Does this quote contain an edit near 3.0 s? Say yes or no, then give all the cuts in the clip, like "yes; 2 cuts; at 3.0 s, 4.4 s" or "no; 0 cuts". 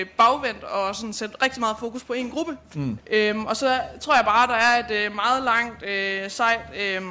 yes; 1 cut; at 3.0 s